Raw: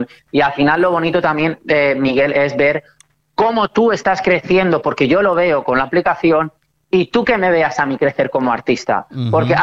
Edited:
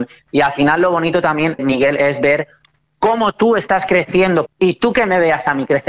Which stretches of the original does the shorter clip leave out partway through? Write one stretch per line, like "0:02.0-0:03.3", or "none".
0:01.6-0:01.9
0:04.8-0:06.8